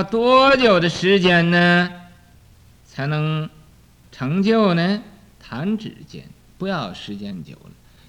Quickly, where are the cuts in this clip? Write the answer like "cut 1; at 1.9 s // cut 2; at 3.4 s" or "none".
none